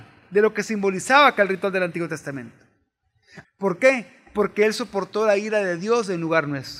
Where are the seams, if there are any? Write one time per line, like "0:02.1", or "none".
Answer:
0:03.4

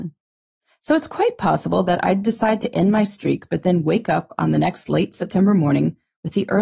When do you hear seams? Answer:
none

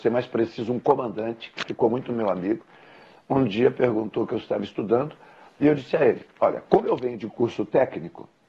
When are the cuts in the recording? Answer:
none

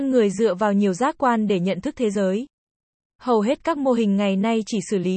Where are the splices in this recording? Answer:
0:03.1

